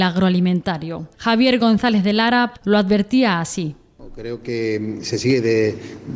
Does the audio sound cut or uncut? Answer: cut